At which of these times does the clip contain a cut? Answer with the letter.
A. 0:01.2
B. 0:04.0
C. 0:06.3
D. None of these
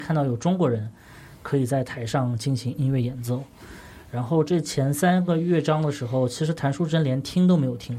B